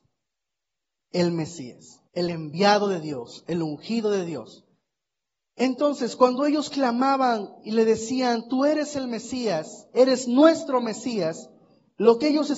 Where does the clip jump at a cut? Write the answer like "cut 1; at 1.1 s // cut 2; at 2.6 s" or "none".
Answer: cut 1; at 2.1 s